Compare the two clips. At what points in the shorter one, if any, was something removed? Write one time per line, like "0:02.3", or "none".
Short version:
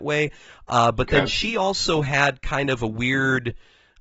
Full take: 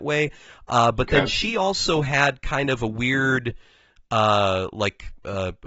none